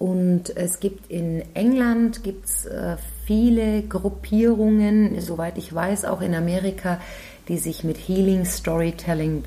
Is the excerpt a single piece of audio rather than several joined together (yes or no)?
yes